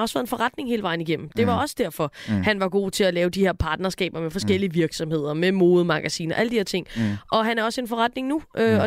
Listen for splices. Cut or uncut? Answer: uncut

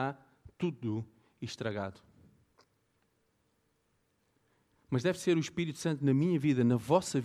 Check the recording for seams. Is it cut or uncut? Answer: uncut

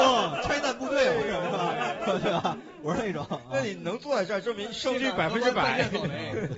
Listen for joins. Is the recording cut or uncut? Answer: uncut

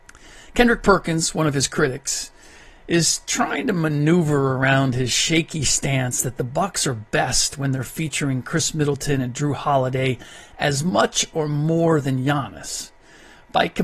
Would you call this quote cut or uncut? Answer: uncut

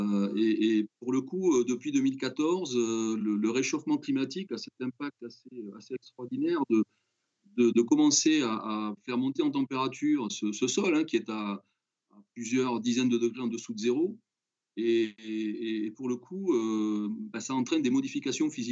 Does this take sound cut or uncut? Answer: cut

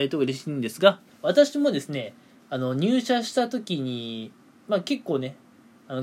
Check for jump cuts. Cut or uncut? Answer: cut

